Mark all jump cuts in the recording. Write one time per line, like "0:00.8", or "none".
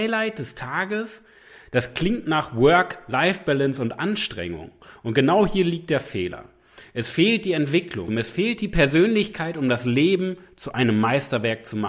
0:08.1